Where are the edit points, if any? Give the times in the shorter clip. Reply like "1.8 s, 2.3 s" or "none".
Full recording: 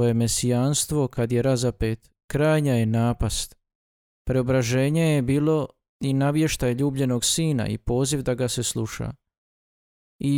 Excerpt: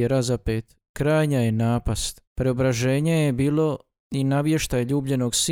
2.3 s

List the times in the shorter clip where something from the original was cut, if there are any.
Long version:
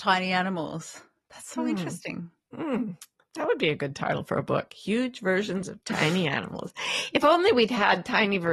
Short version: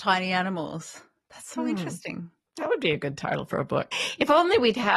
2.5 s, 3.9 s

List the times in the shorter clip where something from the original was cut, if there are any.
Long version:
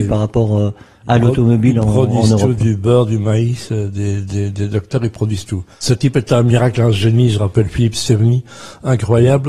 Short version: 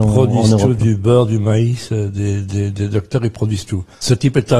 none

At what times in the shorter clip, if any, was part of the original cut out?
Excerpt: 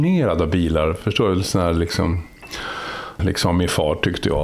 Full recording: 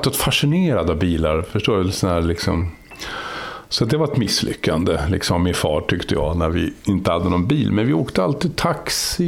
3.2 s

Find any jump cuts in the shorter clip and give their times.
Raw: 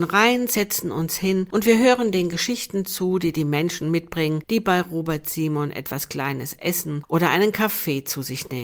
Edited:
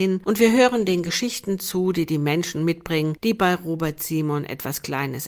none

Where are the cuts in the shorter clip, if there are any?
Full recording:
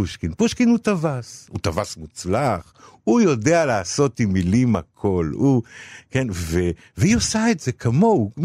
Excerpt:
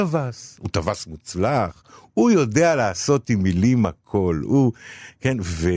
none

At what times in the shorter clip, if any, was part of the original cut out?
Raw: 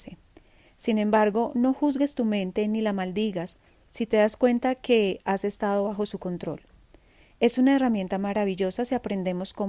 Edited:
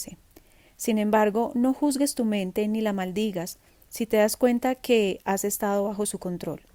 none

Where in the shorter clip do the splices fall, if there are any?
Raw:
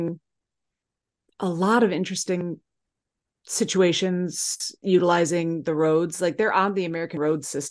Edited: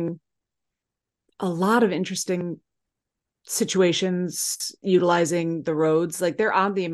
none

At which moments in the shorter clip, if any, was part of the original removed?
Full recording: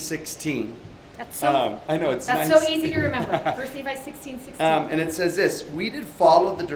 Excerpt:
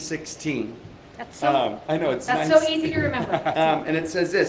3.5 s

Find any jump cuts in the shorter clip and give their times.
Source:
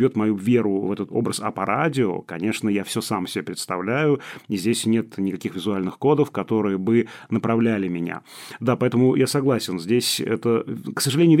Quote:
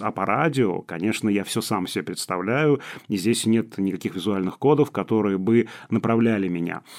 none

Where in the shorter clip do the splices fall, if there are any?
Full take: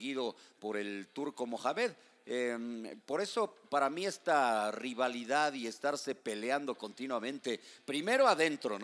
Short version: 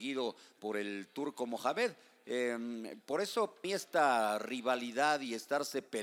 3.6 s

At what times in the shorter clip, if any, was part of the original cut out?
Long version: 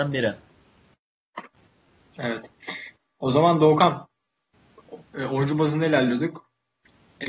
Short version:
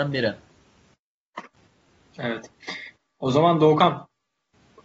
none

